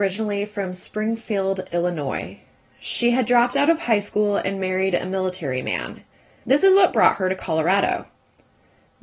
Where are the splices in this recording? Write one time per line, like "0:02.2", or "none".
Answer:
none